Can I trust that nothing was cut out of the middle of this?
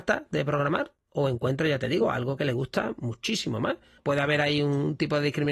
no; 1 cut; at 4.0 s

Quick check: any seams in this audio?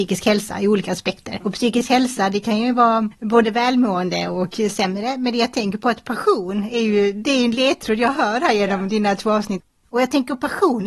no; 0 cuts

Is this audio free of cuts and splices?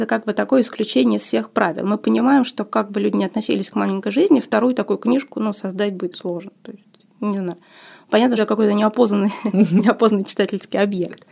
no; 2 cuts; at 6.1 s, 8.4 s

